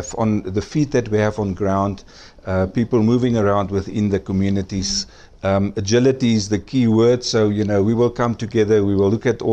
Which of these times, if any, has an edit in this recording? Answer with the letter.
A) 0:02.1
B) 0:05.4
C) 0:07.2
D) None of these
B